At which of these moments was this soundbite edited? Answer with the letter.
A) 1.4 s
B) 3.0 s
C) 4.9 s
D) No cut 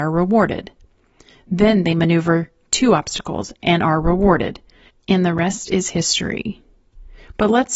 C